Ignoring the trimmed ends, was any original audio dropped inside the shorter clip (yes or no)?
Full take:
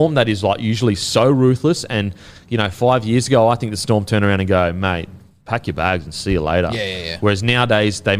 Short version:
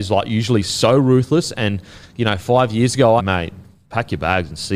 yes